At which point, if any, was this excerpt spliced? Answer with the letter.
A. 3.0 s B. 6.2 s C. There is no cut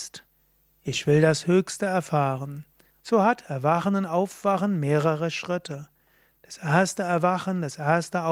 A